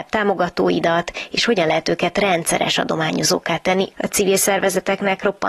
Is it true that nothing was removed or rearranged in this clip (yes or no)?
no